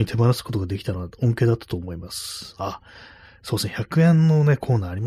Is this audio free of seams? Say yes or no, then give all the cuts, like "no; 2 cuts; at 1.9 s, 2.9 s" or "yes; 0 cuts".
yes; 0 cuts